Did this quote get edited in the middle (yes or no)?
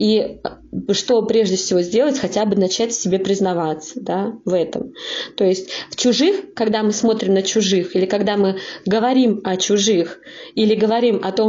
no